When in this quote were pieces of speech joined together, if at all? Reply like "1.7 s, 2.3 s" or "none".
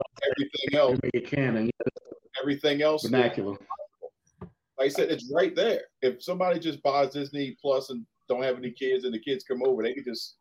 5.9 s